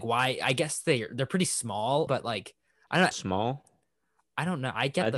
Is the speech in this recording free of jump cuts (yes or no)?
no